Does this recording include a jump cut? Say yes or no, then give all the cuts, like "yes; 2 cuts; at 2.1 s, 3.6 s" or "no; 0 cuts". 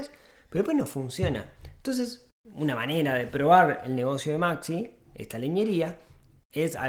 no; 0 cuts